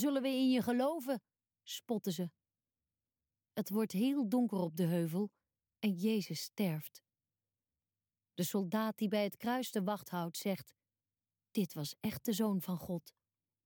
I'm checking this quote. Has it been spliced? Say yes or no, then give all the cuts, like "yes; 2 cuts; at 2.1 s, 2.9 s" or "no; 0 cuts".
no; 0 cuts